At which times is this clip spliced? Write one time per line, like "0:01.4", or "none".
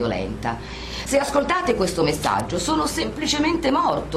none